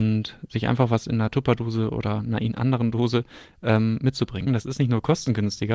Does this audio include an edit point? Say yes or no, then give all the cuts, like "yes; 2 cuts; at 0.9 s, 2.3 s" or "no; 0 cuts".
yes; 1 cut; at 4.5 s